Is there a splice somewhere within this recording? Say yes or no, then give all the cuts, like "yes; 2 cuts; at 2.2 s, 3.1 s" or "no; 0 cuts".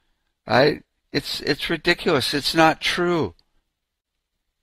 no; 0 cuts